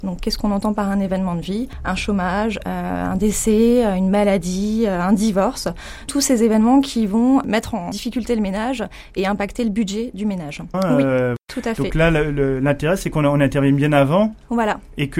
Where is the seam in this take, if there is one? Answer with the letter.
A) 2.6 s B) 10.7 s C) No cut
B